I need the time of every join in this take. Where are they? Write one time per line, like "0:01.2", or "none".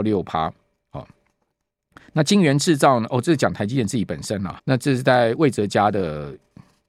0:04.6